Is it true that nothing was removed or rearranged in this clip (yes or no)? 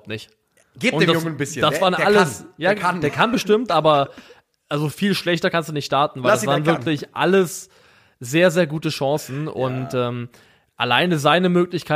yes